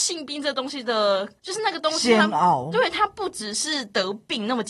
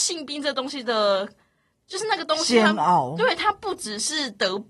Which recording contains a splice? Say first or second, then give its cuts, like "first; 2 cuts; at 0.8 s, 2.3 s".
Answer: first; 1 cut; at 1.4 s